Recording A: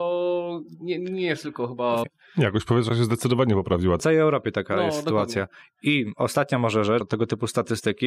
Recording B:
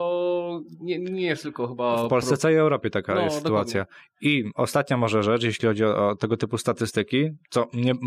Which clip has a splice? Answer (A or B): A